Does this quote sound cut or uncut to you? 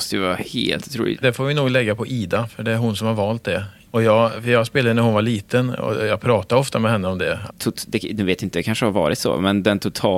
cut